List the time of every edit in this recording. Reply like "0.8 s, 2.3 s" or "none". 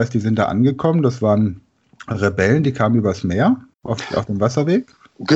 3.7 s